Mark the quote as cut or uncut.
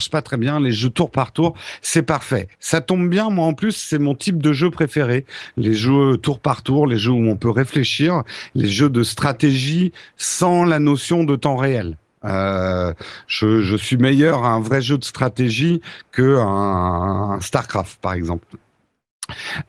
uncut